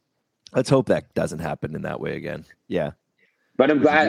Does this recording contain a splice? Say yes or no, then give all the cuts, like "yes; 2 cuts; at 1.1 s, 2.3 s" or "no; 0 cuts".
yes; 1 cut; at 2.5 s